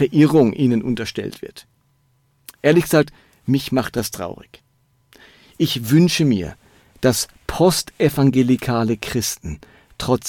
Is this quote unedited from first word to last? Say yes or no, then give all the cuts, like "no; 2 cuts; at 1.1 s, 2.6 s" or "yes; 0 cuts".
yes; 0 cuts